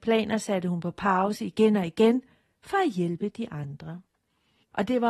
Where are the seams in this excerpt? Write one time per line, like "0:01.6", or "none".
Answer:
none